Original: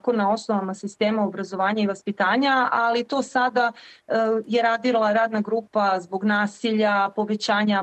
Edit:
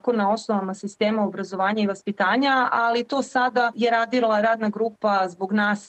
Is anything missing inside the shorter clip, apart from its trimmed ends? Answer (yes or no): yes